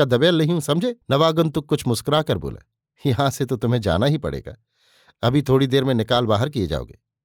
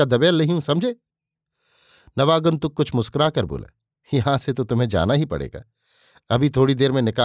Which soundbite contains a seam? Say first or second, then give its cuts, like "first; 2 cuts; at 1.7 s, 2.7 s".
first; 1 cut; at 1.0 s